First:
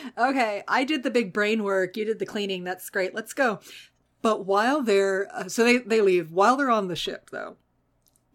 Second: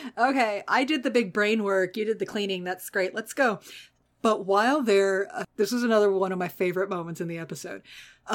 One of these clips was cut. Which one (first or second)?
second